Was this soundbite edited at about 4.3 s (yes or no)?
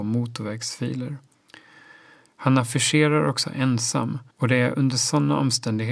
yes